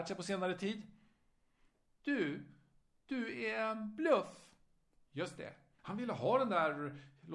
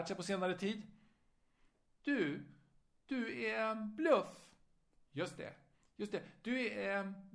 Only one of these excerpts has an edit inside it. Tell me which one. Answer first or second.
first